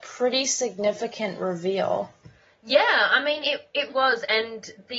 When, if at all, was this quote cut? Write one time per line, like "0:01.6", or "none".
0:03.9